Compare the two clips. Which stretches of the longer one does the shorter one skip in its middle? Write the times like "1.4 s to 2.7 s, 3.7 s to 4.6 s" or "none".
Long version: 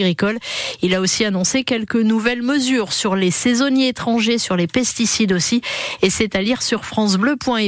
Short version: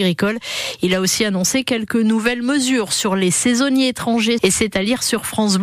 4.4 s to 6.0 s